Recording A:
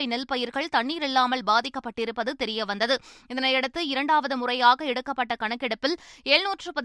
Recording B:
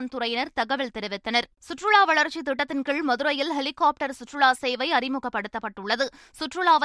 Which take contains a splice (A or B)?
B